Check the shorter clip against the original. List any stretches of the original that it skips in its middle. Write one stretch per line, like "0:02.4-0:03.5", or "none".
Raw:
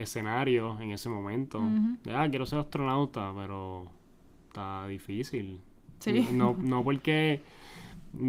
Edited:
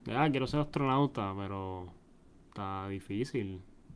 none